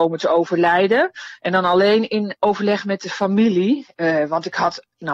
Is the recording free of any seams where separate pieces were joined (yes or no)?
yes